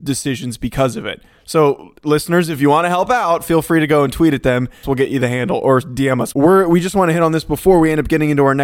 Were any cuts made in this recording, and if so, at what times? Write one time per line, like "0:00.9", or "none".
0:04.8
0:06.3